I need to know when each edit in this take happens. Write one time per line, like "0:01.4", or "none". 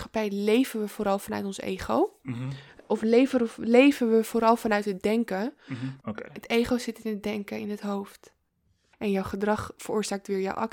0:06.0
0:08.9